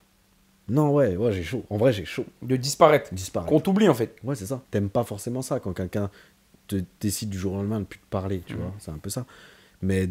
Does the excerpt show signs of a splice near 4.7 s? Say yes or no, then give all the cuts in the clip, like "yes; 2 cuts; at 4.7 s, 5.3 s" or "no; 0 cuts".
yes; 1 cut; at 4.7 s